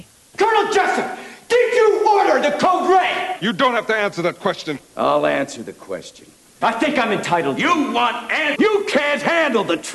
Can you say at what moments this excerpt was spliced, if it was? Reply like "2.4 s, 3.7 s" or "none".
6.6 s, 8.5 s